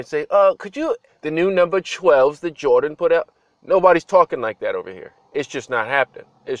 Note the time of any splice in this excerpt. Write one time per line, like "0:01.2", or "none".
0:01.1